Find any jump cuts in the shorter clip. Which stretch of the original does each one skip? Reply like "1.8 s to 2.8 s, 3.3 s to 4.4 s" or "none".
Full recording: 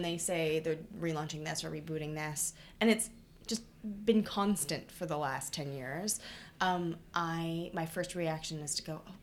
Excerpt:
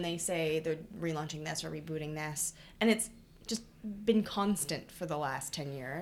none